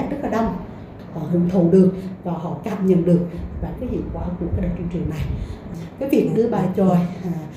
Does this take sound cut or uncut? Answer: cut